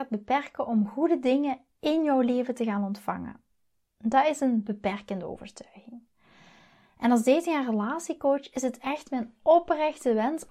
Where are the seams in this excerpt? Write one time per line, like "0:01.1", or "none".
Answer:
none